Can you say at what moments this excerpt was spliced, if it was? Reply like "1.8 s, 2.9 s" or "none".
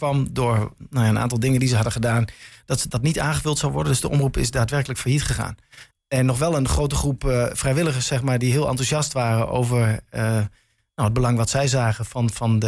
5.9 s